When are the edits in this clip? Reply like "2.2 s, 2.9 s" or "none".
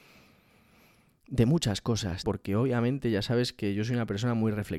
2.2 s